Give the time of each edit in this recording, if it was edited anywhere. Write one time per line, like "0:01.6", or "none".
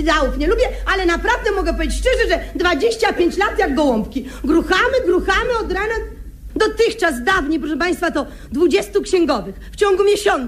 0:06.5